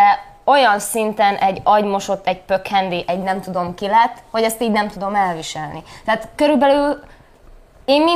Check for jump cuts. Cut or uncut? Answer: uncut